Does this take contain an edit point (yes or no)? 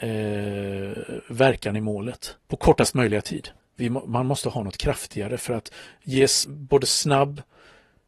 yes